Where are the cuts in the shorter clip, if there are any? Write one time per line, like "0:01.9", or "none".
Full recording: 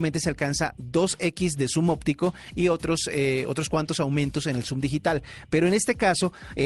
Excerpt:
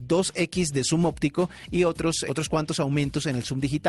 0:02.3